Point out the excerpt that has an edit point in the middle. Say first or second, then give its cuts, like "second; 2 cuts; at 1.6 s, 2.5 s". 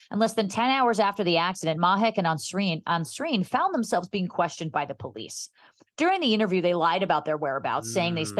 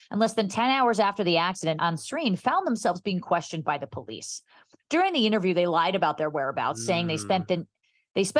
second; 1 cut; at 1.8 s